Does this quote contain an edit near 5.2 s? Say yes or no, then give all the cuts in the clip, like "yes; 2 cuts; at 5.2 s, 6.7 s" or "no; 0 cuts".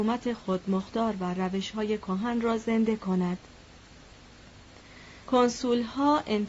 yes; 1 cut; at 5.2 s